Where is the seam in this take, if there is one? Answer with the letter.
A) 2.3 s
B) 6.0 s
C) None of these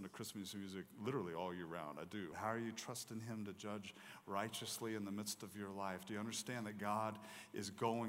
A